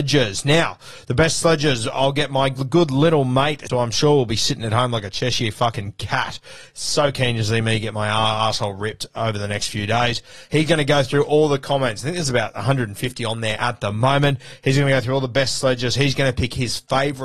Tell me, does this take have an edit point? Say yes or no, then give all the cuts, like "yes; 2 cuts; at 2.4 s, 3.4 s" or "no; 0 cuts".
yes; 1 cut; at 3.7 s